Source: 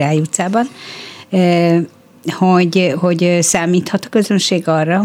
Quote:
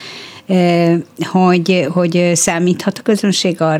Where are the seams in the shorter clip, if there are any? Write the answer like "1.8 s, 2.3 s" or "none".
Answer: 1.1 s